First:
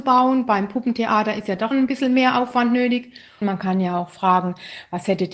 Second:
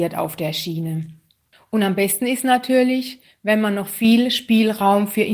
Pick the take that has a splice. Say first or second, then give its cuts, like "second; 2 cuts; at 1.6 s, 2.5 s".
first; 2 cuts; at 1.7 s, 3.4 s